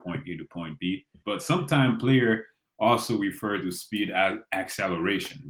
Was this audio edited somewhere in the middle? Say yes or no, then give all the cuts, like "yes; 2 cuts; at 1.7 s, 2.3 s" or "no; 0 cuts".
yes; 1 cut; at 1.2 s